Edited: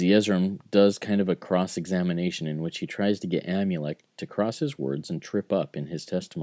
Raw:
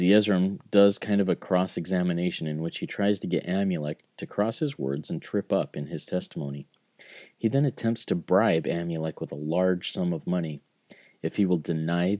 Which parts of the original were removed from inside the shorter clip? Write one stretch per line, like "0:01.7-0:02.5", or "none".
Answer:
none

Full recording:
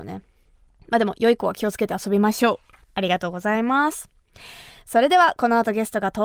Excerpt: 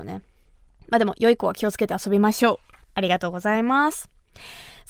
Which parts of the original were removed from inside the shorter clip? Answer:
none

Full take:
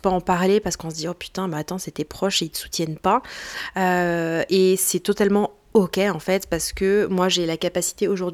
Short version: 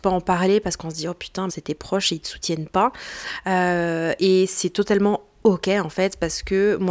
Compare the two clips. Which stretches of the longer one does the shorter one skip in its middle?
0:01.5-0:01.8

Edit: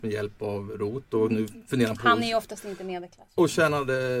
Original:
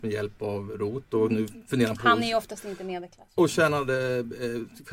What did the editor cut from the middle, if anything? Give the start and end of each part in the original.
none

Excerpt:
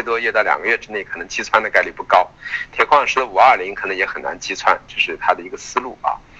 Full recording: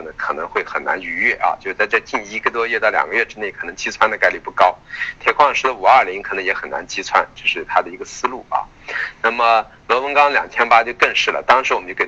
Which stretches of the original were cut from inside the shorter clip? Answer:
none

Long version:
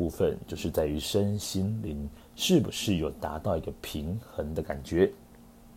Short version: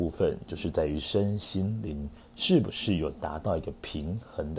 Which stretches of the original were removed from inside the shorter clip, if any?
none

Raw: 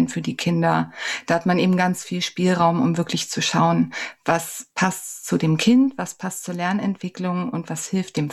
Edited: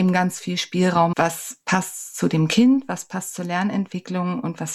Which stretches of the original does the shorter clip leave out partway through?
0:02.8-0:04.2

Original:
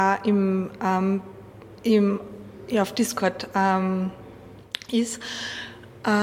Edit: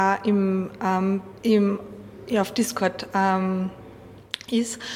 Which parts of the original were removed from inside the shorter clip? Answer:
0:01.4-0:01.8

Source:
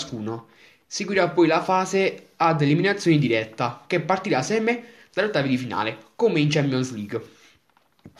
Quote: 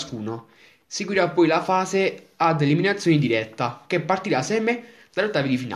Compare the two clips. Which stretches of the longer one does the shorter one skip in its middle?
none

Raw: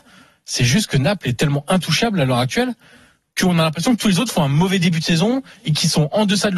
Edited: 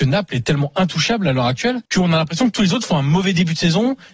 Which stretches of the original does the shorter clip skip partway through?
0:02.8-0:03.3

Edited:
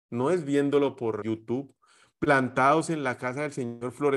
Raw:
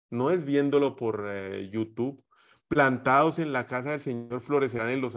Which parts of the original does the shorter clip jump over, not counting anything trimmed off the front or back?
0:01.2-0:01.7

